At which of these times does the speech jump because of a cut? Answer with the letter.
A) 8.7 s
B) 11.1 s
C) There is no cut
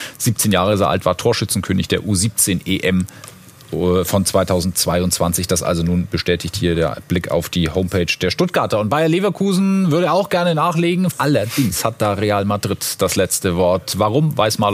B